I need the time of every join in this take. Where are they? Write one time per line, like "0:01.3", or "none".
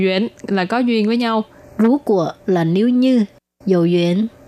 0:01.6